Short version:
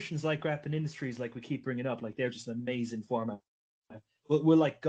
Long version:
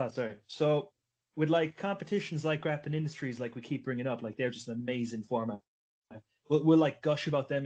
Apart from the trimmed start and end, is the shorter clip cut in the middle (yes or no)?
no